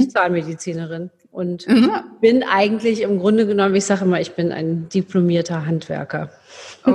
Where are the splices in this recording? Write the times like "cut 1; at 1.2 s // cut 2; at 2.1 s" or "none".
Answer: none